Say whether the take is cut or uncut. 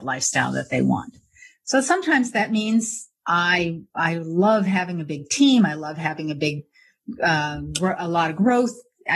uncut